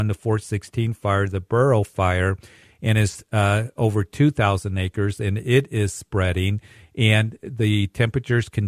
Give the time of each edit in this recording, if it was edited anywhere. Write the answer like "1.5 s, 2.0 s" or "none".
none